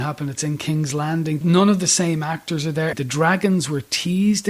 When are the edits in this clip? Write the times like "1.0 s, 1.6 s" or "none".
1.4 s, 2.9 s